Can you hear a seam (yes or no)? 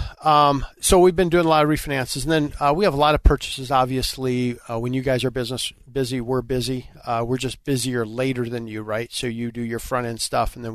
no